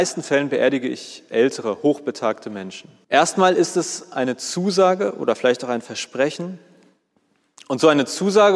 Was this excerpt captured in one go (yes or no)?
no